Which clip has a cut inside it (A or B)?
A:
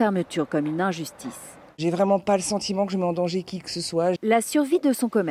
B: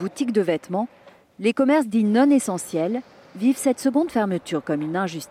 A